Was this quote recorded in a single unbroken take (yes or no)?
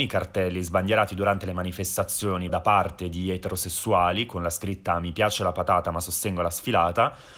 no